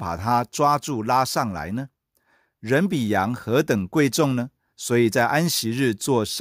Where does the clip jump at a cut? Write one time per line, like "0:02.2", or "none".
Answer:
none